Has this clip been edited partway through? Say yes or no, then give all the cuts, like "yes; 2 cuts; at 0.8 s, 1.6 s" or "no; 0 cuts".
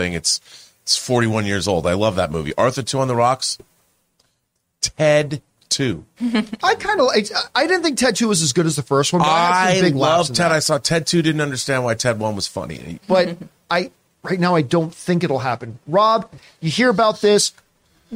yes; 1 cut; at 13.0 s